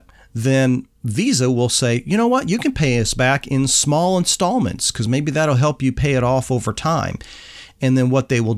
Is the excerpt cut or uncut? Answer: uncut